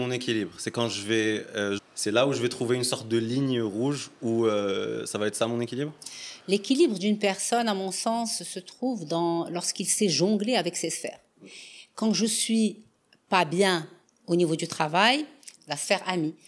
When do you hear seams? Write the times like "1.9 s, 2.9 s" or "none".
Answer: 1.8 s, 15.6 s